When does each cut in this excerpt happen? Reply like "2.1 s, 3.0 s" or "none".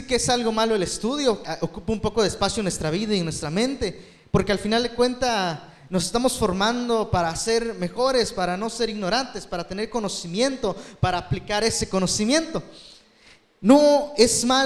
1.5 s